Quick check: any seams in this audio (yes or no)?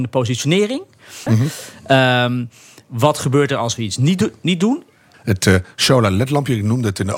yes